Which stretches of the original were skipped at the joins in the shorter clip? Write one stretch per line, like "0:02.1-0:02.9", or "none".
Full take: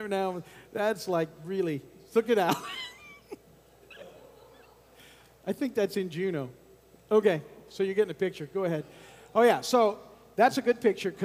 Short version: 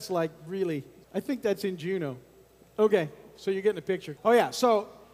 0:02.0-0:05.4
0:08.5-0:09.3